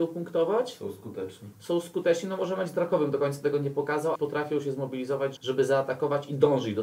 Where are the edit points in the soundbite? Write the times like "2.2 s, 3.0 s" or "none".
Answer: 4.1 s, 5.4 s